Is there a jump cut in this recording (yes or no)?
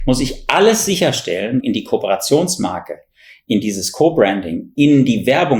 yes